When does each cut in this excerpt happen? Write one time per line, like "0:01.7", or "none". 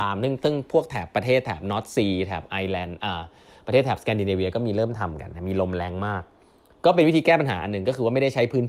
none